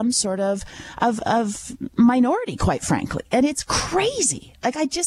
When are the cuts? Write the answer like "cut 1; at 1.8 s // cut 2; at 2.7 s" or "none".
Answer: none